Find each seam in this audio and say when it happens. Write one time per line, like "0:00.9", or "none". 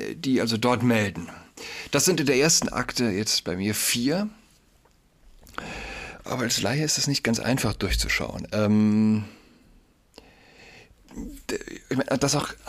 0:06.2